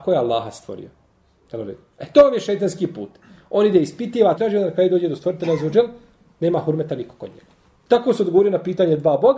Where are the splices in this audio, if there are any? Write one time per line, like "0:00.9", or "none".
0:04.4
0:07.9